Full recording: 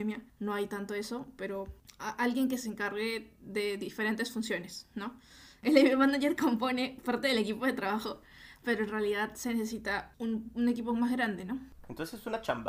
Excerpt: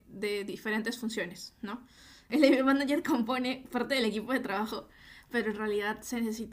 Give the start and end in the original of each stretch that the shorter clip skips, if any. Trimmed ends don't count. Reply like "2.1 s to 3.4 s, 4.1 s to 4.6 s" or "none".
none